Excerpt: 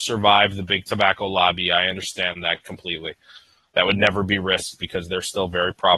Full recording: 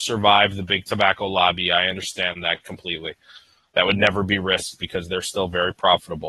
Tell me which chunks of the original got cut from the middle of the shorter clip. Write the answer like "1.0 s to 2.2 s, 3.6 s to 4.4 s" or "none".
none